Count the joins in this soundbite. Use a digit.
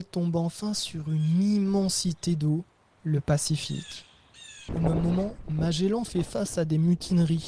1